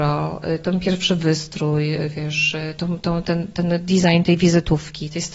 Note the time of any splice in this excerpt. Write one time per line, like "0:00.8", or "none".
0:02.8